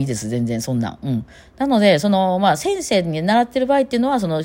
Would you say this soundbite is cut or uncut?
uncut